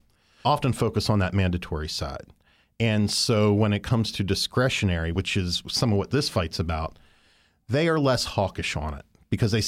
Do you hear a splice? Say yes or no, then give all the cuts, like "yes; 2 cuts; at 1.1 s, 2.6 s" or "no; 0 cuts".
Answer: no; 0 cuts